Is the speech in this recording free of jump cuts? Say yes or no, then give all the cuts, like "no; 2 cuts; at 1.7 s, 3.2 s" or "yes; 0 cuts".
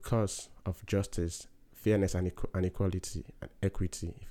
yes; 0 cuts